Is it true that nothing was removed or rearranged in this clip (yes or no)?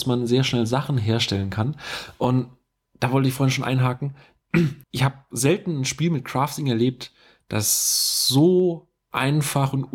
no